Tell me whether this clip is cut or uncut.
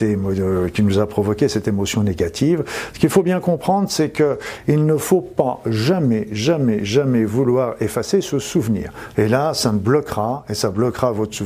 cut